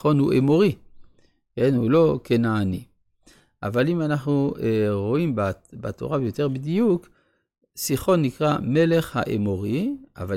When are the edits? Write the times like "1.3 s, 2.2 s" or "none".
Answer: none